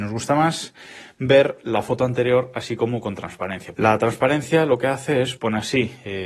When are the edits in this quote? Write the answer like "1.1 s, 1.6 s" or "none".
3.7 s, 5.4 s